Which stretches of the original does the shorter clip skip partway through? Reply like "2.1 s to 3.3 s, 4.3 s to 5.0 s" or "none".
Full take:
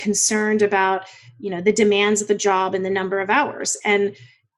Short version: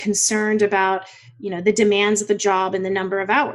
none